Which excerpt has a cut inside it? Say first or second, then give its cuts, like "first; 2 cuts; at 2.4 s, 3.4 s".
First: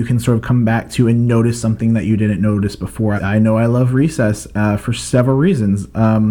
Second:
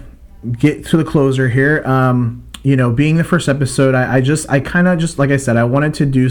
first; 1 cut; at 3.2 s